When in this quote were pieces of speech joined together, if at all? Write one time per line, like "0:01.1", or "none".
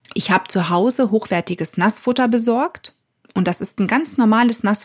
none